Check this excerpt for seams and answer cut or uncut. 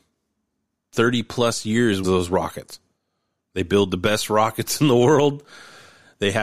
cut